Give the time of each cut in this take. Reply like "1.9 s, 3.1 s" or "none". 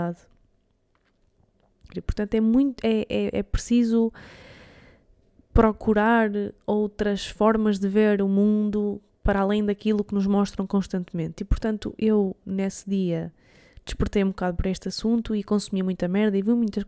1.9 s